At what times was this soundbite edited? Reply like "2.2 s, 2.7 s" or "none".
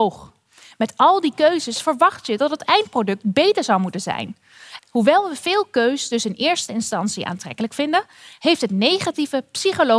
4.8 s